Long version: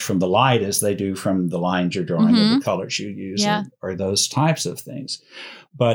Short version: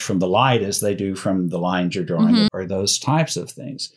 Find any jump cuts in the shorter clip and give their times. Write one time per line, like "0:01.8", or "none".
0:02.5

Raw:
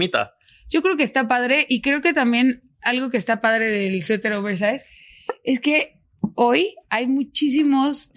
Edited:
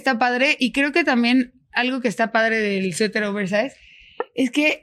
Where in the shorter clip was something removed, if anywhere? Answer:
none

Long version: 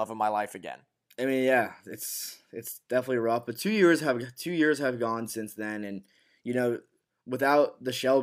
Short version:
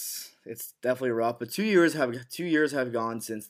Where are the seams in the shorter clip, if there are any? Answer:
none

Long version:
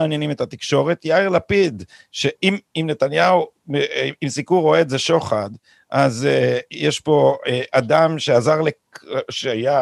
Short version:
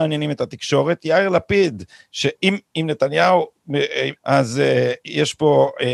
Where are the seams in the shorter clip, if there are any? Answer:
0:04.2

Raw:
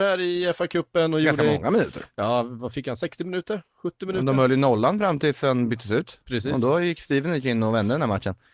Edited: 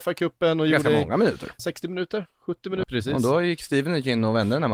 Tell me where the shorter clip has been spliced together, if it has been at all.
0:01.6
0:02.8

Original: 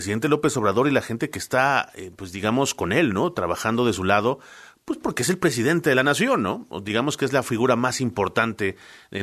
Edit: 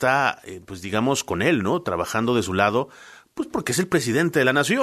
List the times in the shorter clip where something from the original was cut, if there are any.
none

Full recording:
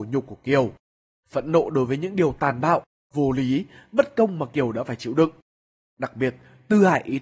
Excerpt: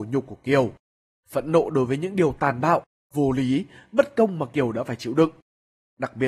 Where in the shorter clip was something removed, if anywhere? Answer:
none

